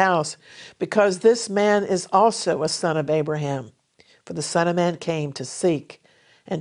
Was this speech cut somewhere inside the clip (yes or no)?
no